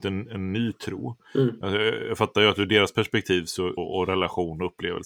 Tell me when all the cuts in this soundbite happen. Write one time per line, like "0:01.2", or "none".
0:03.8